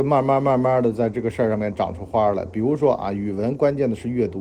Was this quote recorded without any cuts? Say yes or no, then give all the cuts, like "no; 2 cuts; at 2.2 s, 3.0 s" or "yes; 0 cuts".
yes; 0 cuts